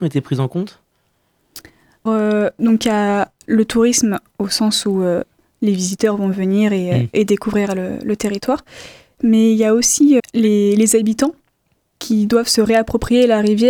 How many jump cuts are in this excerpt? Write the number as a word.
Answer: two